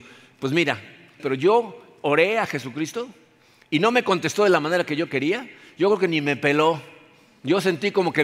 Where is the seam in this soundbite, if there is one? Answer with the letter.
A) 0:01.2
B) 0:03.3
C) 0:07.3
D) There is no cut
A